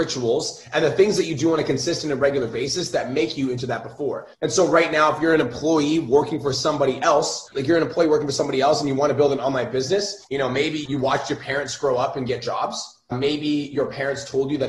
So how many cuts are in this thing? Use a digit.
1